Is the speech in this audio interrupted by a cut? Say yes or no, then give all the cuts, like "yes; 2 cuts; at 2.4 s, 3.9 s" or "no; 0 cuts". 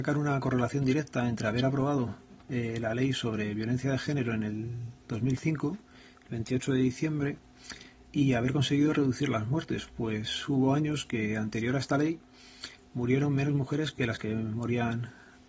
no; 0 cuts